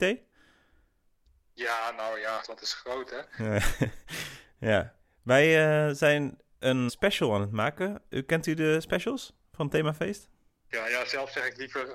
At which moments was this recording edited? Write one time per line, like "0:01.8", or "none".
0:02.4
0:06.9
0:10.7